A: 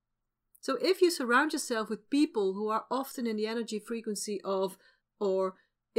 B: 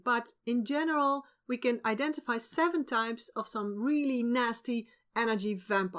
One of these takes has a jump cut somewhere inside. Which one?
A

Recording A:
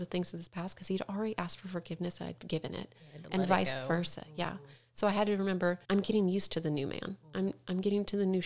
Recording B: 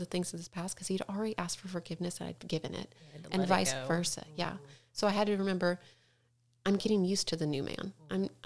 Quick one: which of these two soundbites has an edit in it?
A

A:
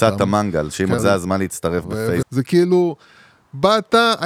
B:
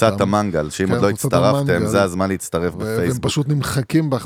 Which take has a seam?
A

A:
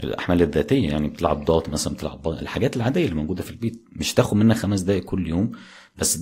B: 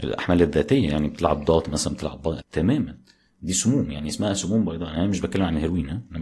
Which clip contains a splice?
B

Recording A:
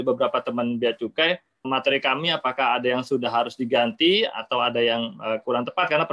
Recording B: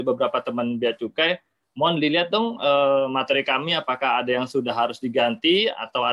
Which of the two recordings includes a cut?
A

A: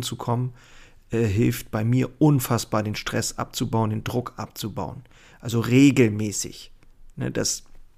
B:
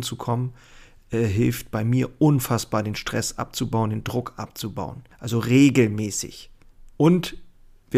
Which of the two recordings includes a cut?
B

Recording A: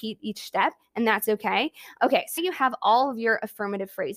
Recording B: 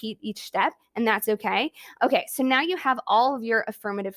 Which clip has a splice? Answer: A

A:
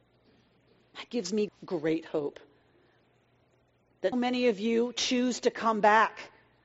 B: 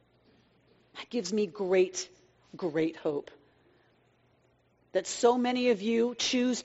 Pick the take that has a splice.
A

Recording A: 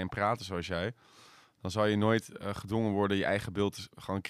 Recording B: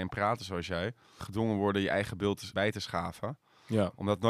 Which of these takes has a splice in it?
B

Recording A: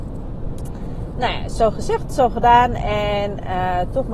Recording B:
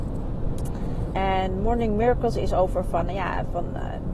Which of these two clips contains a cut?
B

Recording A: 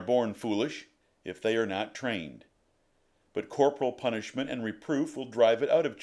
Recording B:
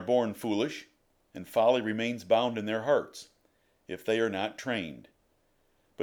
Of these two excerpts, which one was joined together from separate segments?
A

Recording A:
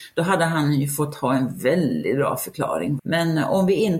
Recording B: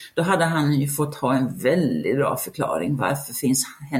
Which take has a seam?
A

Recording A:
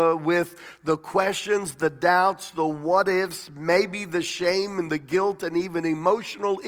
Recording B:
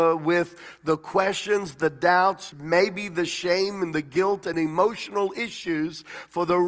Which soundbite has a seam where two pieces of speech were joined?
B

